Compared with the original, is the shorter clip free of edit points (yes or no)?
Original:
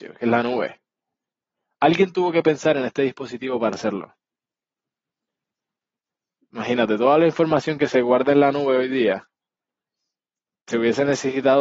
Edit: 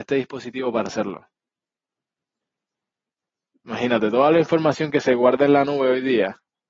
yes